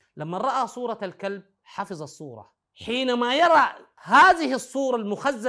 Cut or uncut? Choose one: cut